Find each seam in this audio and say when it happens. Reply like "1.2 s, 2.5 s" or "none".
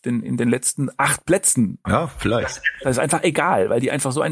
1.8 s